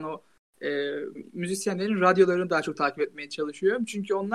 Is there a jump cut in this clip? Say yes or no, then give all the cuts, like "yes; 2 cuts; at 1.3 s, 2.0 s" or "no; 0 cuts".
yes; 1 cut; at 1.1 s